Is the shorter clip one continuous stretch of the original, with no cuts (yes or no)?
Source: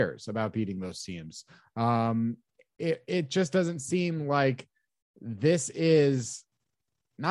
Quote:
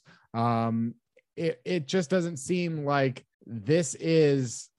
no